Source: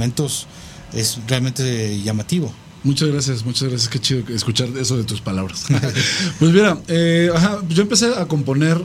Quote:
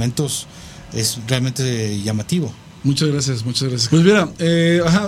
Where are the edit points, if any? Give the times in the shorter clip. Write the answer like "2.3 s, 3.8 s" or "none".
3.9 s